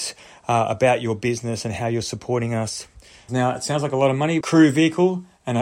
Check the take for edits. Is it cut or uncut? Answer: cut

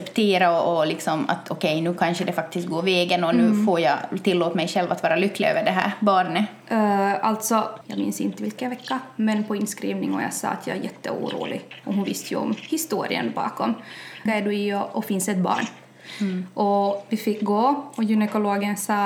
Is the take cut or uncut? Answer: cut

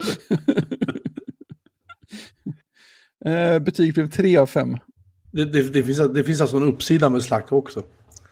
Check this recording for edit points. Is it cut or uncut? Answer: uncut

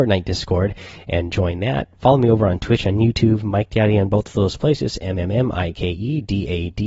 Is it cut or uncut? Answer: uncut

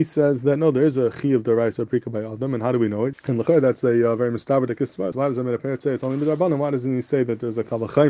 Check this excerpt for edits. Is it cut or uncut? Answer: cut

